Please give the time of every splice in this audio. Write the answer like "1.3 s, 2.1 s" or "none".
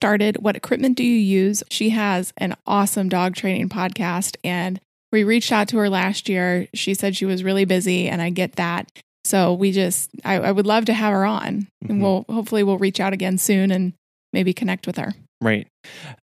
1.7 s